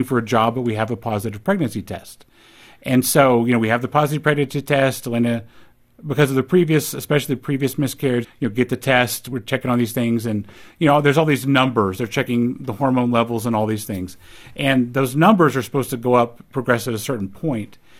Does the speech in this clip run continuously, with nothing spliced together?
no; 1 cut; at 8.2 s

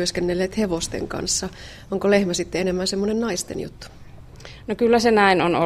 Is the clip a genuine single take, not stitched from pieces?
yes; 0 cuts

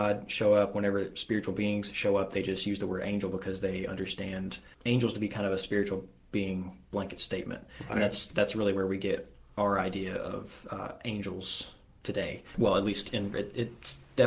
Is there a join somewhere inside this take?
yes; 1 cut; at 13.3 s

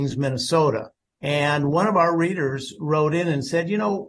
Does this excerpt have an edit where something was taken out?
no; 0 cuts

